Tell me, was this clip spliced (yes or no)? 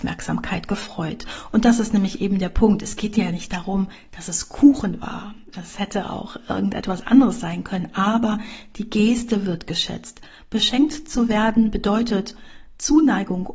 no